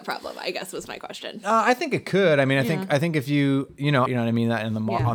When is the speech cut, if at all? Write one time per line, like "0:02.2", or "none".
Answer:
0:04.1